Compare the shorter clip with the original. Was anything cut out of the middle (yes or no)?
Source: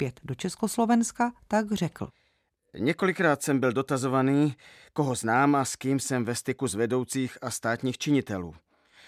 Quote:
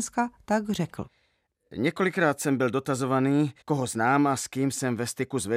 yes